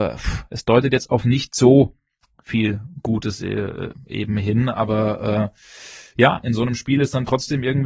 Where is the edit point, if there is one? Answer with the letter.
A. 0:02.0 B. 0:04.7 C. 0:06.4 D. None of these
D